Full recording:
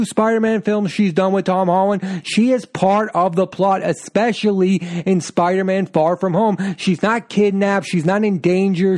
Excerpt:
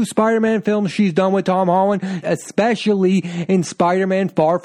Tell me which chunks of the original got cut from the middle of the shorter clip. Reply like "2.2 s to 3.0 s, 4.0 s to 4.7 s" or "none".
2.2 s to 3.8 s